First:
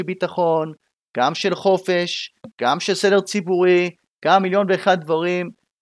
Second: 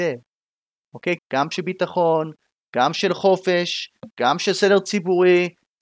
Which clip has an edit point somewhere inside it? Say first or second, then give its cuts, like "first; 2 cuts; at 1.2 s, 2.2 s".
second; 1 cut; at 1.2 s